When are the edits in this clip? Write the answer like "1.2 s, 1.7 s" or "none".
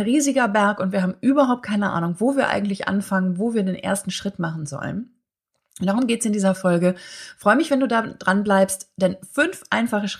none